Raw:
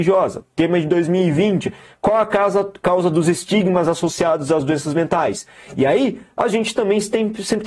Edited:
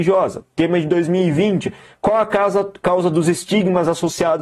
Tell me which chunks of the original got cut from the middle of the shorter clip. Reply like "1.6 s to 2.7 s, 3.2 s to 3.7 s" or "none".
none